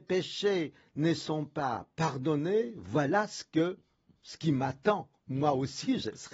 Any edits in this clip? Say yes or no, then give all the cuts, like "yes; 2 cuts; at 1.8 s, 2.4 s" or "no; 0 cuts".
no; 0 cuts